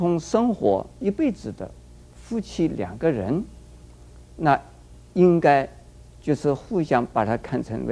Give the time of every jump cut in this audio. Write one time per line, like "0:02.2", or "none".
none